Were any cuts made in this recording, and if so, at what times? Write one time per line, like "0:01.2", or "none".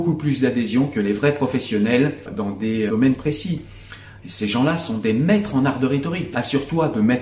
0:02.9
0:04.2
0:06.3

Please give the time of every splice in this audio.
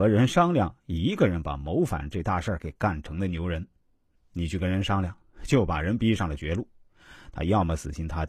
0:04.2

